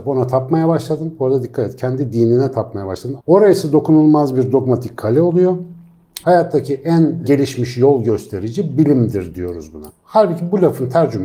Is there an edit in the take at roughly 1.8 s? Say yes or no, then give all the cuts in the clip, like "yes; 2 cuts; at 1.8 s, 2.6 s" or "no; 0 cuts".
no; 3 cuts; at 3.2 s, 6.2 s, 9.9 s